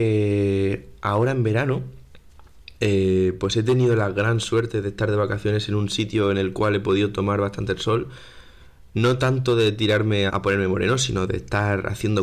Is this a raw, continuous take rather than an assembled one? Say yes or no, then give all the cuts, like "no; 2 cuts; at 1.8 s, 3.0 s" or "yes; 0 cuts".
no; 1 cut; at 10.3 s